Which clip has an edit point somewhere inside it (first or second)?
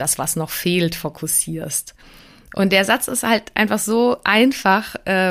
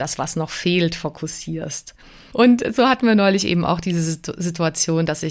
second